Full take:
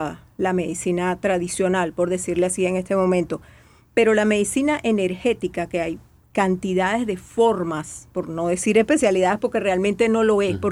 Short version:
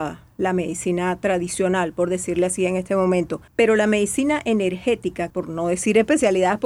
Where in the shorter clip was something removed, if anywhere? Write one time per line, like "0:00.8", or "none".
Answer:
0:03.5
0:05.3